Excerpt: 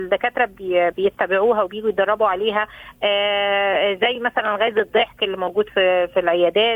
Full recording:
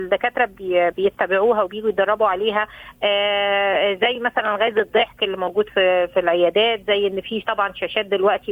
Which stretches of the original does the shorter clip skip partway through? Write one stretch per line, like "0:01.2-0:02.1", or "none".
none